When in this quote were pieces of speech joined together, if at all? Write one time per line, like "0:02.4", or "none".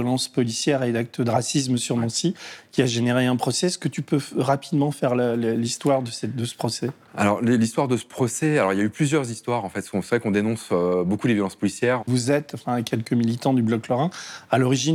0:12.0